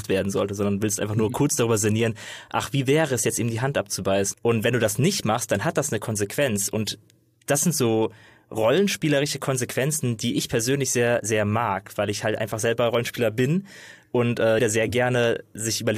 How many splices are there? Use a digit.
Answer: 2